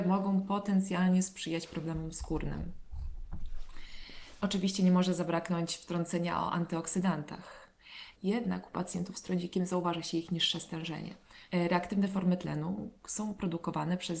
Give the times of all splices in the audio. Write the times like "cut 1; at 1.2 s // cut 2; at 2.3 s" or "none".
cut 1; at 8.2 s // cut 2; at 11.5 s